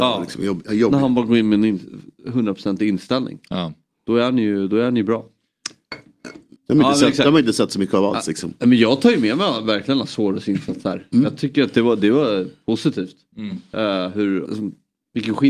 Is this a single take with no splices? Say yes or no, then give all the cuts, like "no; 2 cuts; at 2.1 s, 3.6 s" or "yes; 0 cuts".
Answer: no; 2 cuts; at 6.6 s, 14.4 s